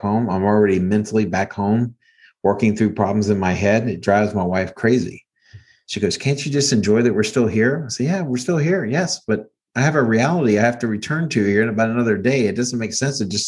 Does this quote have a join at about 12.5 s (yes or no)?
no